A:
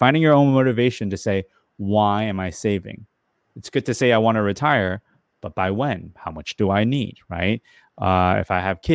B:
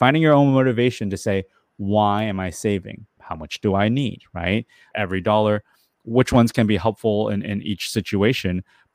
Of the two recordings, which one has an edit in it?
B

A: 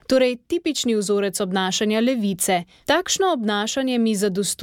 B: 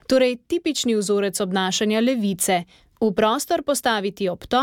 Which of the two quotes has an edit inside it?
A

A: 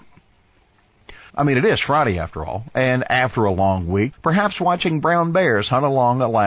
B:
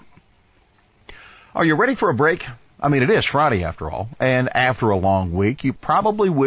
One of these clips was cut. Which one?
A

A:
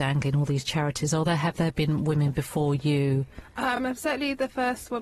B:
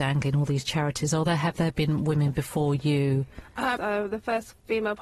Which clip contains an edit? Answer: B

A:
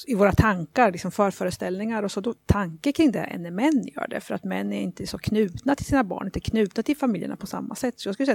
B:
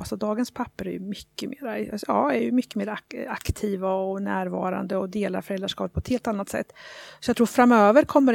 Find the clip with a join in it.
A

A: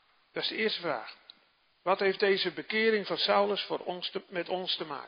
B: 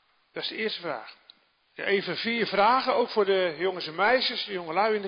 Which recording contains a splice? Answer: B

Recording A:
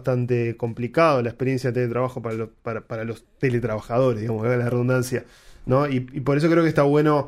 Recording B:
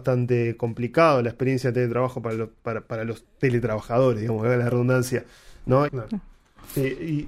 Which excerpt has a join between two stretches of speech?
B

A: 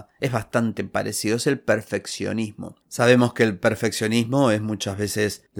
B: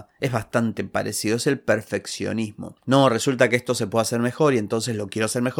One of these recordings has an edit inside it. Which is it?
B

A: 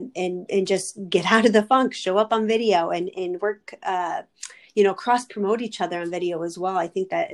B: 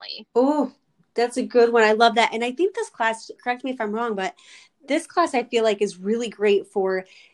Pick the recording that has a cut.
B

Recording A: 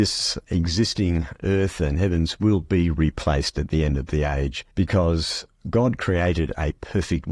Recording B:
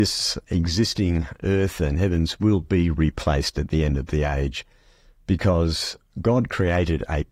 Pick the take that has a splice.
A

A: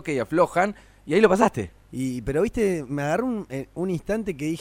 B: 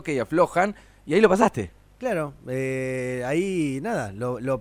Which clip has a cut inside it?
A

